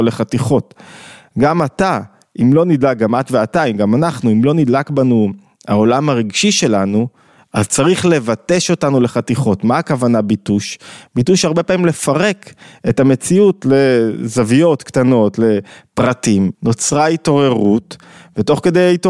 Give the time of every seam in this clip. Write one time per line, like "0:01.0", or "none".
0:16.5

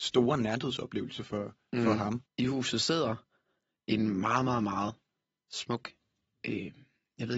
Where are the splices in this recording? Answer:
0:02.3

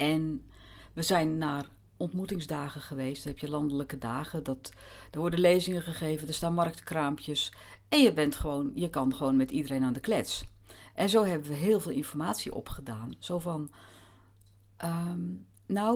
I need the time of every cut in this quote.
none

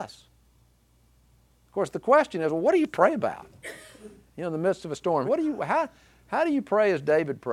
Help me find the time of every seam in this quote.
0:05.2

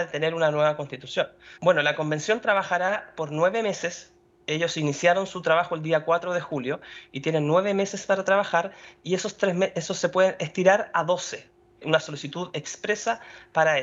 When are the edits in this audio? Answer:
0:01.6
0:11.8

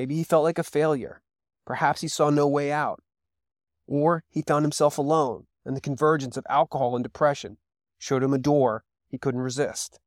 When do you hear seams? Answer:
none

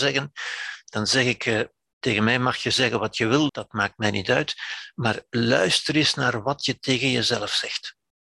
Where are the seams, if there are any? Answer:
0:03.5

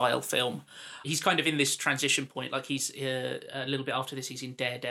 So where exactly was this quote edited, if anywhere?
0:01.0

